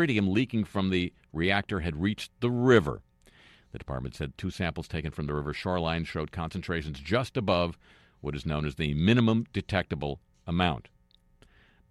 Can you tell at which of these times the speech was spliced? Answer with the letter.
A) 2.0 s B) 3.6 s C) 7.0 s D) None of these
D